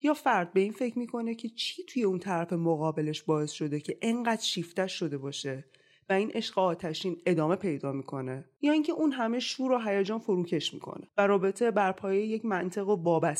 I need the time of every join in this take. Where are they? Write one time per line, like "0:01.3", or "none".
none